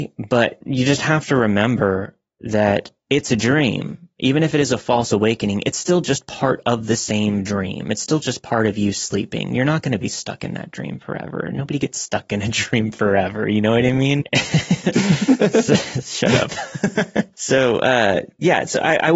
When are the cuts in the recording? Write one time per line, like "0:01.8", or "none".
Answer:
0:14.2
0:17.3

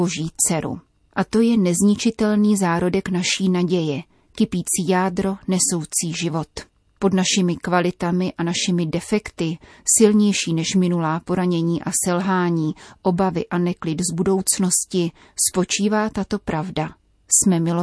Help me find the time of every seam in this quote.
none

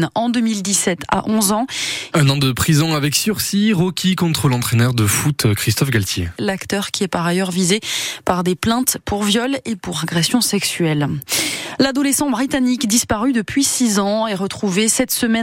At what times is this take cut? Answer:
0:02.1
0:06.4

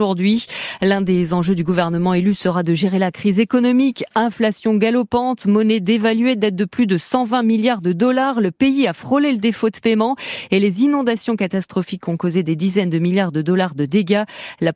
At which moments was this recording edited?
none

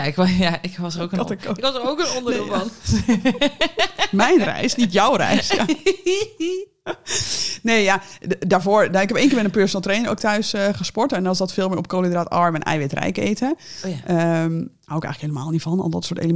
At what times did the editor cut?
none

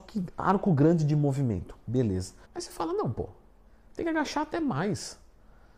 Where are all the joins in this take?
0:02.4

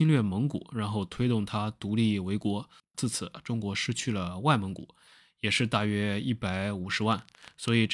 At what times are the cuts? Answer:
0:02.9

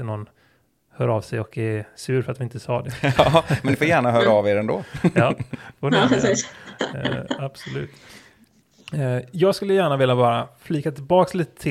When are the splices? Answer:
none

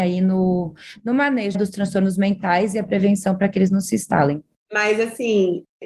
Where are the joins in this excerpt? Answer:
0:01.5
0:04.6

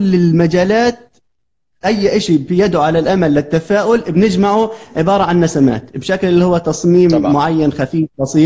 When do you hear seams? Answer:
none

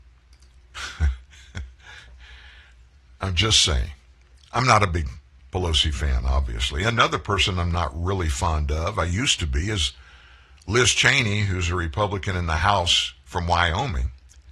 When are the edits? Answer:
none

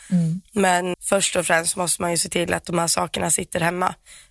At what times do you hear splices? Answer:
0:00.9

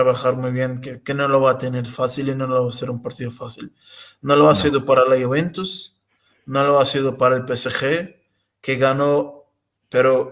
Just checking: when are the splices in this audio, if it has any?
none

